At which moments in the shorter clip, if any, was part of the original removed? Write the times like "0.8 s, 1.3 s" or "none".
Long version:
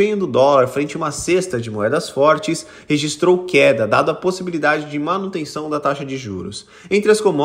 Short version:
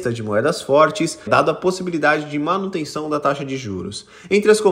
1.3 s